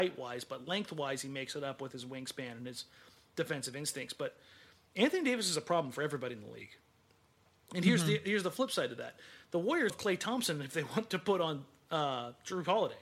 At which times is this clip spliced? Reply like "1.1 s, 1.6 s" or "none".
9.9 s